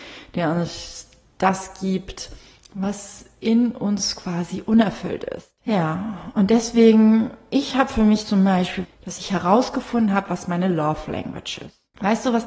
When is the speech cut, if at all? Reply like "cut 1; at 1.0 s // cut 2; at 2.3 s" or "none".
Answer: cut 1; at 5.6 s // cut 2; at 8.8 s

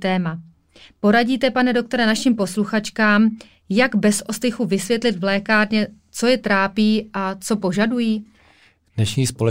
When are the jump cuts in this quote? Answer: none

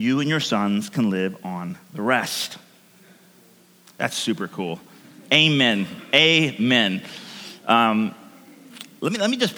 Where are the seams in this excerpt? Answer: none

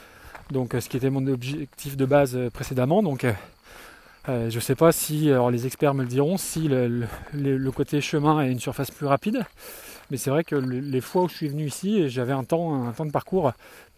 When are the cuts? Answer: none

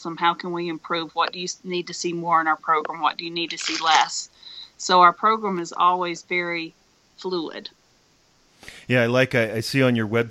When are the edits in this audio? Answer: none

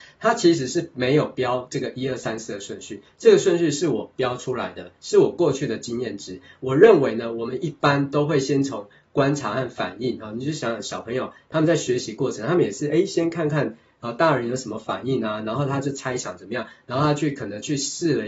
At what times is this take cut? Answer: none

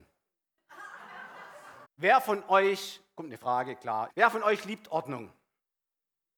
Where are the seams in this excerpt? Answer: cut 1; at 1.8 s // cut 2; at 4.1 s

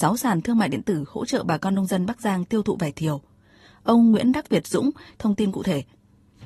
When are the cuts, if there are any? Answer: cut 1; at 5.1 s

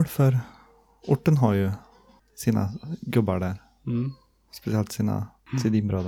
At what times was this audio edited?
none

